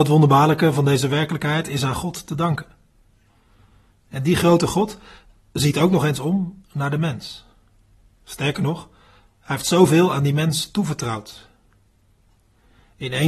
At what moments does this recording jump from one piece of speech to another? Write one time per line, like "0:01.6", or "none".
none

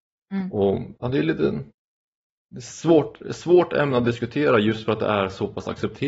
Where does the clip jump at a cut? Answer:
none

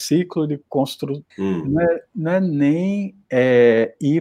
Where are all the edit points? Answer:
0:01.3

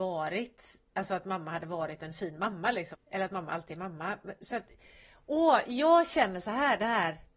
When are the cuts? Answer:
0:02.9

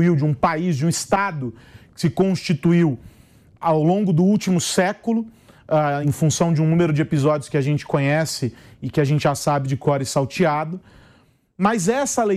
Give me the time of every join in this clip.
0:06.0

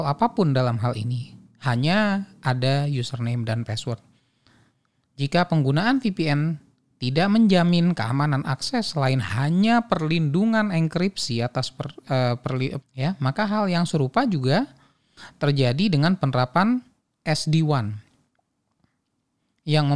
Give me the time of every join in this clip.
0:12.8

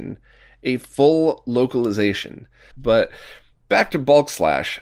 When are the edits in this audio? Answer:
0:02.7

